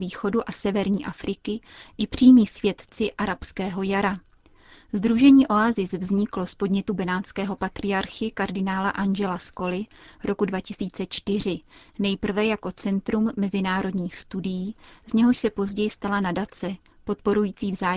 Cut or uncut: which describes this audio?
uncut